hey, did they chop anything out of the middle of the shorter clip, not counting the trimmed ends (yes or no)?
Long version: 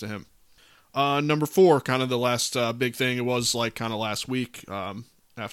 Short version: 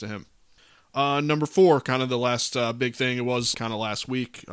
yes